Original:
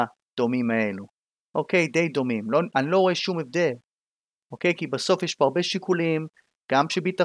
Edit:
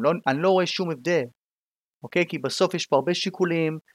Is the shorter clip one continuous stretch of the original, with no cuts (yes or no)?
yes